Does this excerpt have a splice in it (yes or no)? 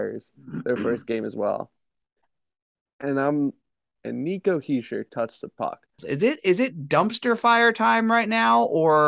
yes